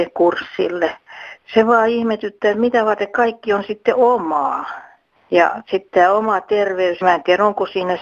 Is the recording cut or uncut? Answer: cut